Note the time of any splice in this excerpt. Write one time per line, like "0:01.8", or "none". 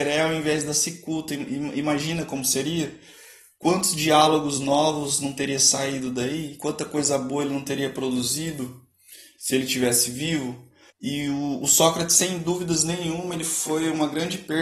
none